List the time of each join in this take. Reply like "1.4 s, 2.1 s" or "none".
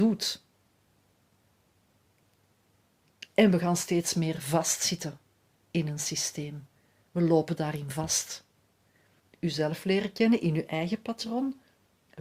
3.3 s, 9.2 s